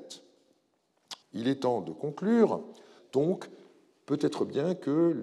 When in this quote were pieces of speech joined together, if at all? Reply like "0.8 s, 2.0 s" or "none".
1.2 s, 3.0 s